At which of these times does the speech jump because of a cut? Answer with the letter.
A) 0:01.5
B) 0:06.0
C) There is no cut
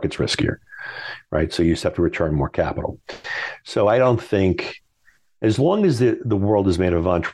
C